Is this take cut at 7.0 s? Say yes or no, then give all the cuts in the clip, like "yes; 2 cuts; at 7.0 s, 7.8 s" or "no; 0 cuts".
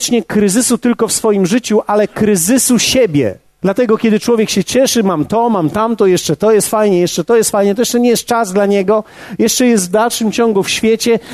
no; 1 cut; at 3.6 s